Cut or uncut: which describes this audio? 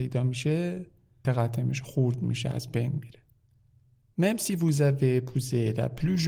cut